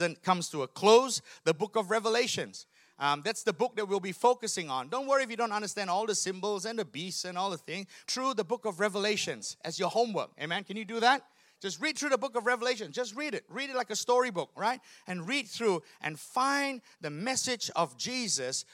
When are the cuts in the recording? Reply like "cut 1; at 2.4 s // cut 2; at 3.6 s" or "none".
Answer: cut 1; at 8.0 s